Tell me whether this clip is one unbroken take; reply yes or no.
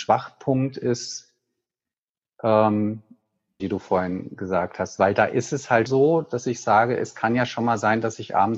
no